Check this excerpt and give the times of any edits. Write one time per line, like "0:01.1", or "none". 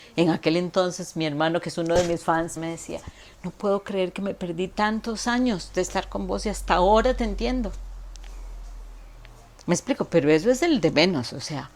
0:02.6